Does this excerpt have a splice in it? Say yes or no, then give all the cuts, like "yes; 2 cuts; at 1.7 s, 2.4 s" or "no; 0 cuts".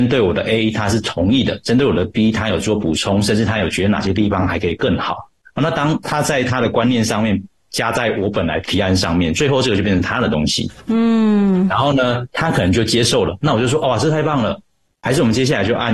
no; 0 cuts